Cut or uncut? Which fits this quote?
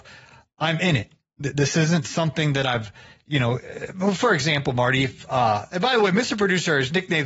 uncut